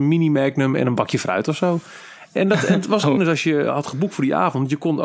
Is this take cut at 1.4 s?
no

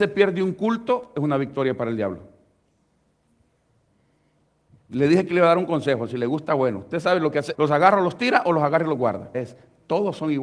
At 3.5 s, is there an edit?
no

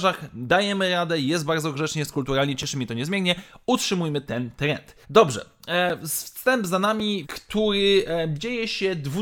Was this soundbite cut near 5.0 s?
yes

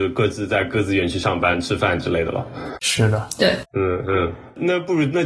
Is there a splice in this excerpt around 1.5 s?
no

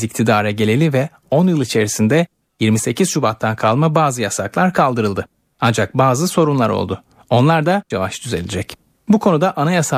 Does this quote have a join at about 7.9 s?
yes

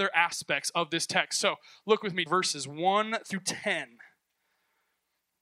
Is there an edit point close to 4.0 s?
no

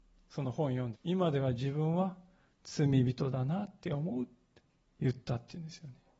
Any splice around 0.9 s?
yes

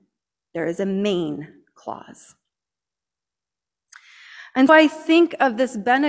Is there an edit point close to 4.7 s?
yes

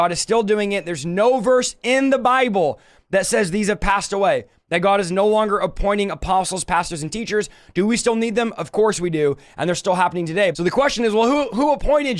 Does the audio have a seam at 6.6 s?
yes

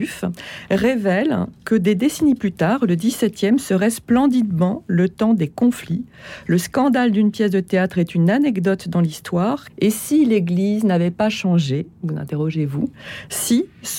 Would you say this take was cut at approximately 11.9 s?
no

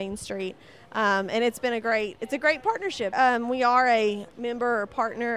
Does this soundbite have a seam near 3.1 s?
yes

